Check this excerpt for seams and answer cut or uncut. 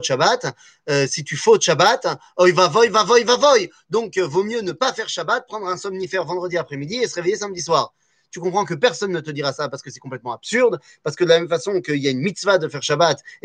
uncut